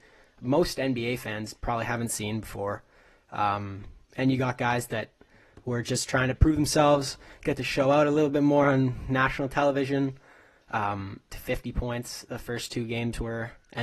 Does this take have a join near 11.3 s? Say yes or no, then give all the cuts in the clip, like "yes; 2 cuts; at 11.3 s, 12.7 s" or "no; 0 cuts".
yes; 1 cut; at 11.3 s